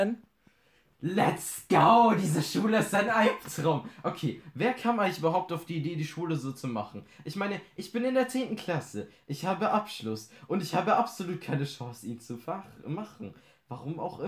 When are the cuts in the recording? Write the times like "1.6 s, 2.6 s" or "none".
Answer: none